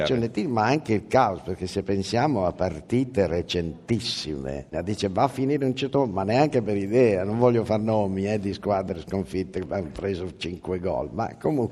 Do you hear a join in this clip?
yes; 1 cut; at 4.7 s

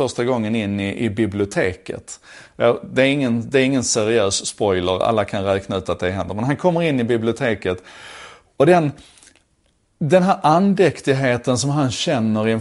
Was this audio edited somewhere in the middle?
no; 0 cuts

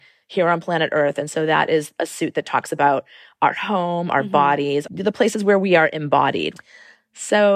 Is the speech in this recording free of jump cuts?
no; 1 cut; at 4.9 s

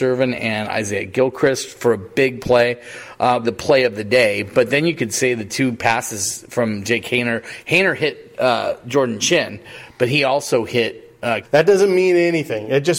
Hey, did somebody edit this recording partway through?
yes; 2 cuts; at 3.4 s, 11.4 s

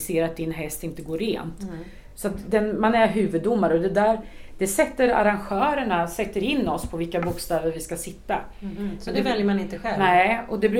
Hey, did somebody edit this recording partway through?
no; 0 cuts

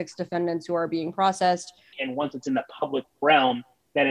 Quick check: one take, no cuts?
no; 1 cut; at 1.9 s

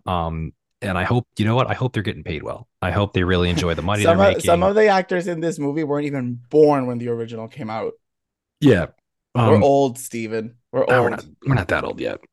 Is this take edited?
no; 0 cuts

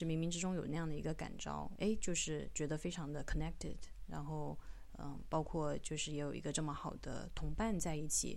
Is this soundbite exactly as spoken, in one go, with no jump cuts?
no; 1 cut; at 1.8 s

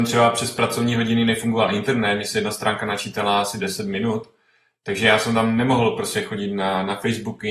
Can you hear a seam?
no; 0 cuts

